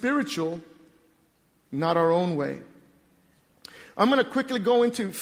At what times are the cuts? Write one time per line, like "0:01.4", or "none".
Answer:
0:01.6